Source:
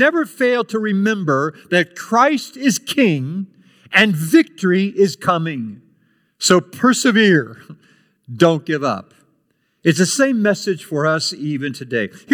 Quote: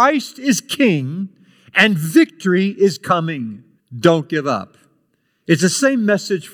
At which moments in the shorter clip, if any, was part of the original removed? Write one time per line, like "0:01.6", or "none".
0:03.8